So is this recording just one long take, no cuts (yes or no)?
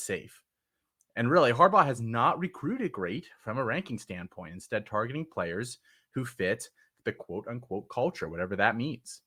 yes